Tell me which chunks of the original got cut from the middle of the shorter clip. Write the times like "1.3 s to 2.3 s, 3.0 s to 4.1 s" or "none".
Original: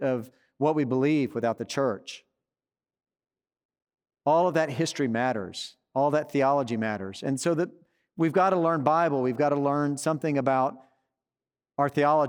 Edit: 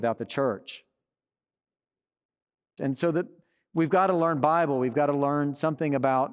4.2 s to 7.2 s